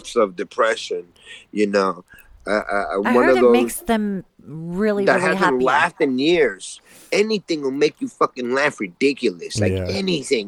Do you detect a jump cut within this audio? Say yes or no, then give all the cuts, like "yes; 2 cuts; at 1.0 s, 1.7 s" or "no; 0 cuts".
no; 0 cuts